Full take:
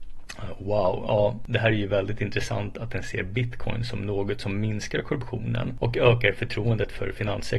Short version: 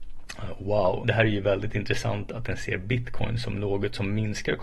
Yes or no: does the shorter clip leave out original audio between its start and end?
yes